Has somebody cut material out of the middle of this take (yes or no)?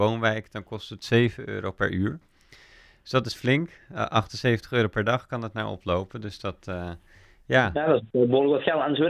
no